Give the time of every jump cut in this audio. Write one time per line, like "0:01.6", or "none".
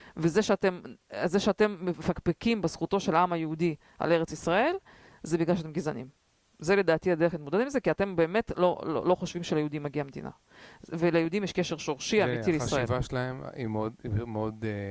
none